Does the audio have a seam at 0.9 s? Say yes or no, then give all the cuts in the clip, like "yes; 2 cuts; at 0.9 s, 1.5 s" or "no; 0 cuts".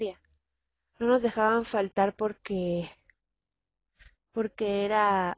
yes; 1 cut; at 0.9 s